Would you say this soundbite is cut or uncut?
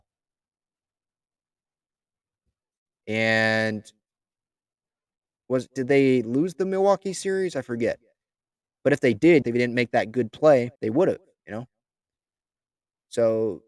cut